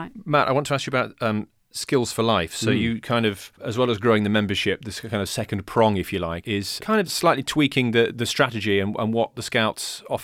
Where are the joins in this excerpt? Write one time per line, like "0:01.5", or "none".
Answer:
0:03.5